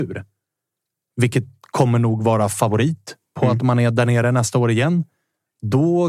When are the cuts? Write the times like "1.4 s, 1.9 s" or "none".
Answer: none